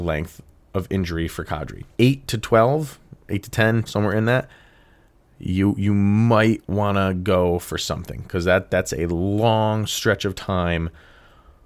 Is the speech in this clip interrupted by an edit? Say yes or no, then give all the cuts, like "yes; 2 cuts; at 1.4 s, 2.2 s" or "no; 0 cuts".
yes; 2 cuts; at 1.9 s, 3.9 s